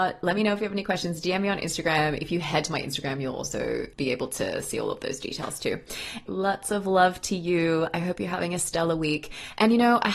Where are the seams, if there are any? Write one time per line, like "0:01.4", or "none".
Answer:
0:03.9
0:06.3